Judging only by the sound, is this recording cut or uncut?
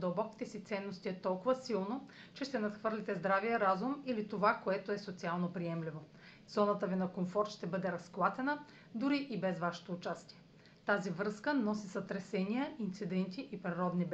cut